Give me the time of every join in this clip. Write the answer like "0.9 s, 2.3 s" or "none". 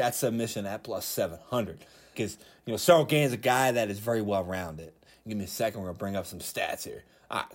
2.1 s, 5.2 s